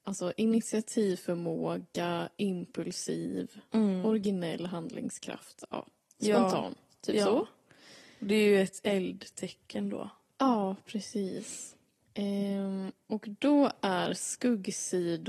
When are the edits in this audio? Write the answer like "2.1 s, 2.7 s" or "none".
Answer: none